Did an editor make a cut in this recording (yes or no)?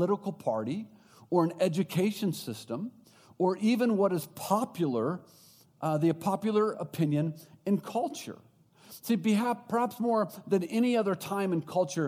no